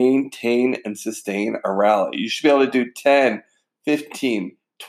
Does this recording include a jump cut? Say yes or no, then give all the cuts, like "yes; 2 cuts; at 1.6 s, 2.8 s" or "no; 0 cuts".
no; 0 cuts